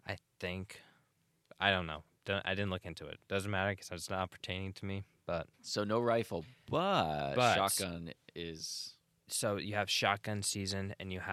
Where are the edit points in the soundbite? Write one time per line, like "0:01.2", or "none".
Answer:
0:05.5